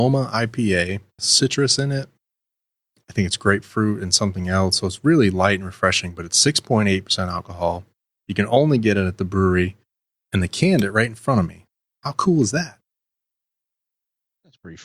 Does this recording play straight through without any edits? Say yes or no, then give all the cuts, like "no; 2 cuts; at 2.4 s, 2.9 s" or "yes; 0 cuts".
no; 1 cut; at 1.2 s